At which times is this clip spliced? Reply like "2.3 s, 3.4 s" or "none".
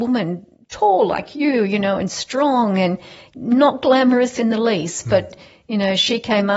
none

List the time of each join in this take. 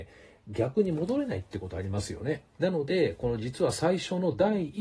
2.5 s

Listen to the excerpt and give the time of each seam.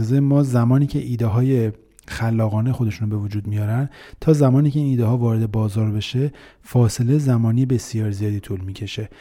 none

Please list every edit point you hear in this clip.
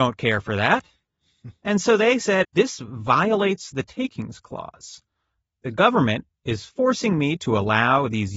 2.4 s

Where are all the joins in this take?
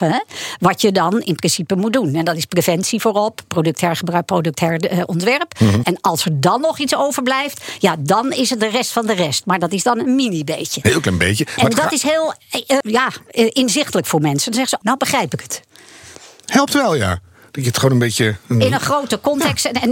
5.8 s, 12.8 s, 14.8 s

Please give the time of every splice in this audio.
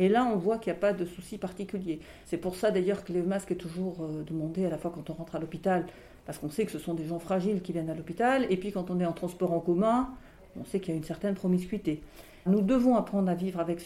2.2 s, 12.5 s

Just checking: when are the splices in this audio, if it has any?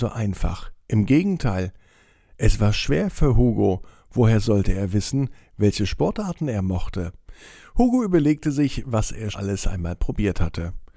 9.3 s

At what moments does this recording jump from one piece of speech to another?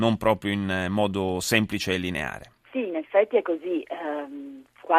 2.6 s

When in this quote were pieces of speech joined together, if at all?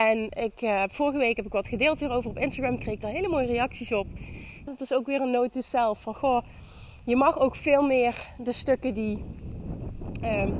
4.7 s

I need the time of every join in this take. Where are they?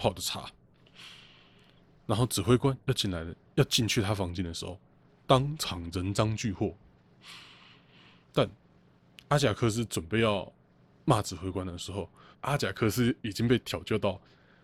12.3 s

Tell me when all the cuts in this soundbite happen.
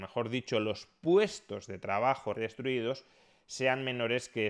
2.3 s

